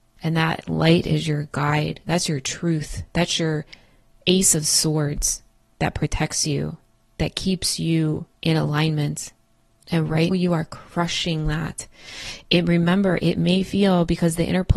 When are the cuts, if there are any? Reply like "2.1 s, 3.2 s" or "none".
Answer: 10.3 s